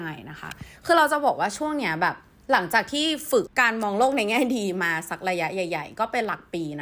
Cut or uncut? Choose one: cut